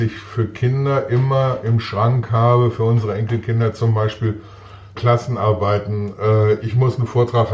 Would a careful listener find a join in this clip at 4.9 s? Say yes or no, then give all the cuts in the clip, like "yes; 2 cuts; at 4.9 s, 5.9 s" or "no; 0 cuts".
yes; 2 cuts; at 4.9 s, 6.6 s